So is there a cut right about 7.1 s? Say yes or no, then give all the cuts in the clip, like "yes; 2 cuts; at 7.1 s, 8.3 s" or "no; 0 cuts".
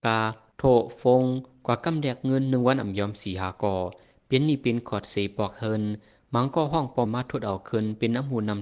yes; 1 cut; at 7.1 s